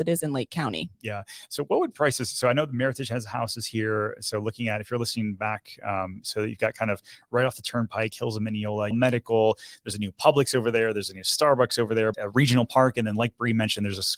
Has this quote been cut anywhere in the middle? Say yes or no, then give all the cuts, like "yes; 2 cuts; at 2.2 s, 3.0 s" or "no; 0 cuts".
yes; 2 cuts; at 8.9 s, 12.1 s